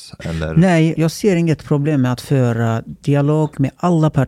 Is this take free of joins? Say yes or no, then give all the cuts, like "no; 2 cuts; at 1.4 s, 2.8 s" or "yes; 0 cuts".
no; 1 cut; at 0.9 s